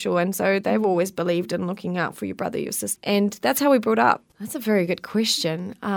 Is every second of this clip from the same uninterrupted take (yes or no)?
no